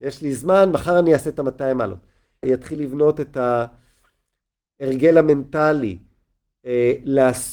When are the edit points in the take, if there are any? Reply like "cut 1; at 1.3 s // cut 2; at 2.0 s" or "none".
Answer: cut 1; at 2.4 s